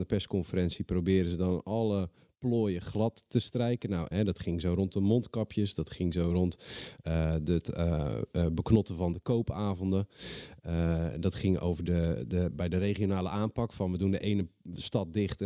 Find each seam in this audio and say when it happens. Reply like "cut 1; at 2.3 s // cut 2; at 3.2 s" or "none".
cut 1; at 4.1 s